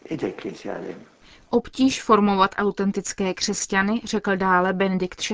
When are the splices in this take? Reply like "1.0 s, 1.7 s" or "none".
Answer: none